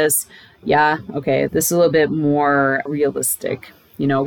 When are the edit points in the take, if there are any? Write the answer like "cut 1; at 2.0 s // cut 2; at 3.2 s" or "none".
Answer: cut 1; at 1.5 s // cut 2; at 2.9 s